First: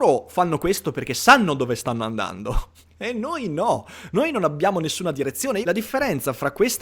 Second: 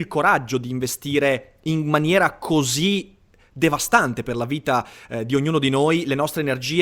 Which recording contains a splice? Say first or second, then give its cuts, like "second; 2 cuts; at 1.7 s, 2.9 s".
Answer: first; 1 cut; at 5.6 s